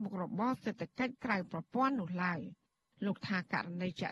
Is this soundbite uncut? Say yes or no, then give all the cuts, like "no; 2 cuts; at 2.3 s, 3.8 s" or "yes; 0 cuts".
yes; 0 cuts